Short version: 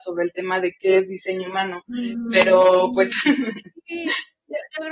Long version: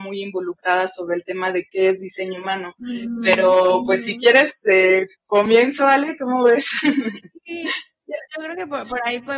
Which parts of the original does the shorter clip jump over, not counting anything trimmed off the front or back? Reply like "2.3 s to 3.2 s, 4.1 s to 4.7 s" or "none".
4.0 s to 6.7 s